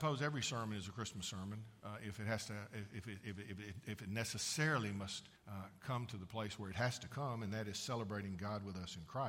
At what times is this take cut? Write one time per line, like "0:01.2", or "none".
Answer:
0:05.4